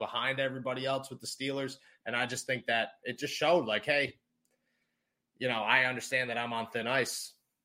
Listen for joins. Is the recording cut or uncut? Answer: uncut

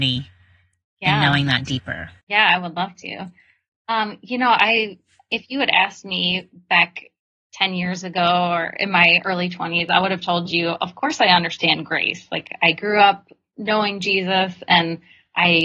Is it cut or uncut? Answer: cut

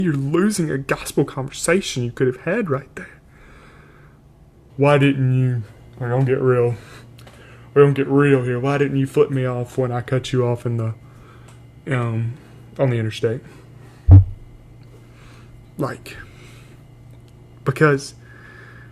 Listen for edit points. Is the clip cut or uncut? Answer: cut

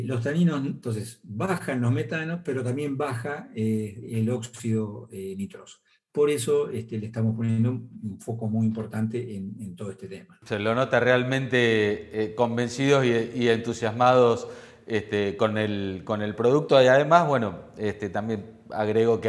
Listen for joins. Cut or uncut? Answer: uncut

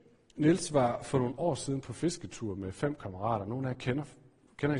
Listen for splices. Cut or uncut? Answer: uncut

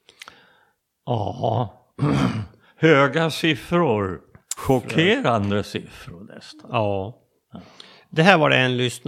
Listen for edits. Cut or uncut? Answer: cut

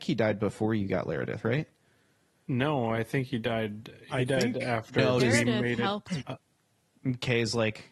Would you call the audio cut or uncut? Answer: cut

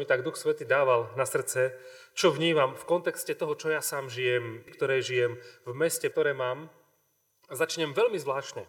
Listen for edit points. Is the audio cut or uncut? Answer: cut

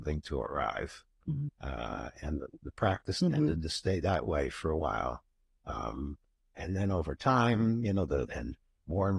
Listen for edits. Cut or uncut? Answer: cut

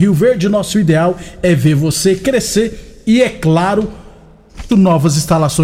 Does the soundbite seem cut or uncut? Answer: cut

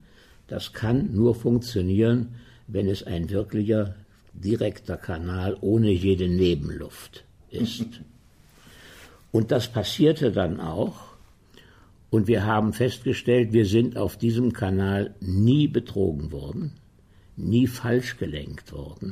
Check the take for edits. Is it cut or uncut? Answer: uncut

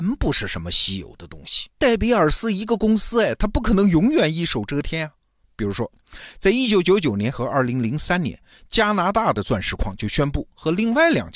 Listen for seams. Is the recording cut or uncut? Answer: cut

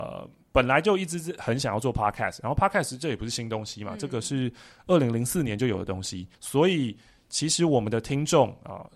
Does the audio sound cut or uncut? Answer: cut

